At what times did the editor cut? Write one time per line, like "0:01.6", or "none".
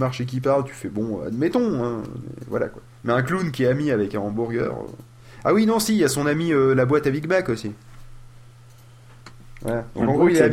none